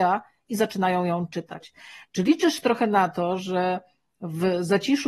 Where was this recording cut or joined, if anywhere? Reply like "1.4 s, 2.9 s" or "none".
none